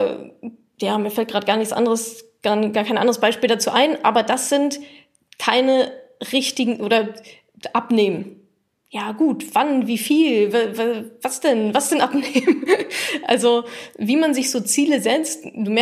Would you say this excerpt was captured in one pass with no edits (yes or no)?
yes